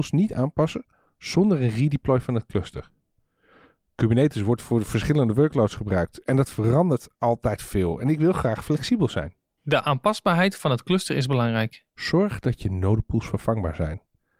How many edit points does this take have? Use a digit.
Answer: 1